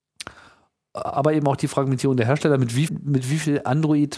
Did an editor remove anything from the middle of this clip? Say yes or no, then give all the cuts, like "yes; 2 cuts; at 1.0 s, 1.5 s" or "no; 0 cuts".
yes; 1 cut; at 2.9 s